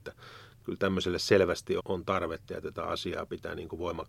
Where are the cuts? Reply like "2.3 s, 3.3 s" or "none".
1.8 s